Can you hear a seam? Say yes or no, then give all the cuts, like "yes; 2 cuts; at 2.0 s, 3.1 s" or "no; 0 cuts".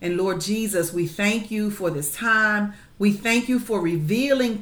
no; 0 cuts